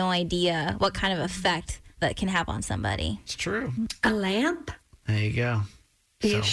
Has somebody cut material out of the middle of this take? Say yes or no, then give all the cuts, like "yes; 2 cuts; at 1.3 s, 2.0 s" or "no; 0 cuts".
yes; 1 cut; at 5.0 s